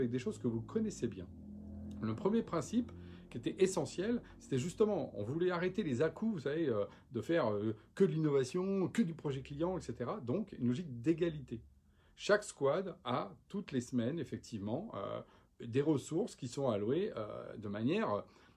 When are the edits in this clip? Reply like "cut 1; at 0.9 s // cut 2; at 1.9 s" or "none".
none